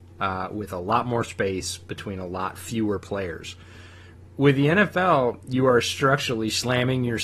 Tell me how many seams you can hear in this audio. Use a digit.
0